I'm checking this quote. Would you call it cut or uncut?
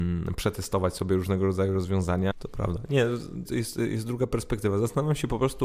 cut